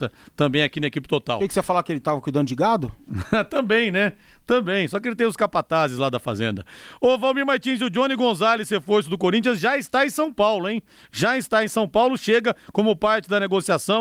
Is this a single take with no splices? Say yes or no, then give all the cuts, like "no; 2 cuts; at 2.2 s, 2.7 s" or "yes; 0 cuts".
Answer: yes; 0 cuts